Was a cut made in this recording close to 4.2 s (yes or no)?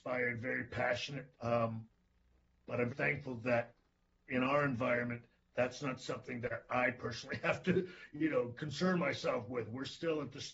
no